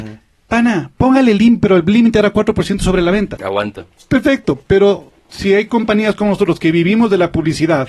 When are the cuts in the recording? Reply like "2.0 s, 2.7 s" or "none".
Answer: 3.4 s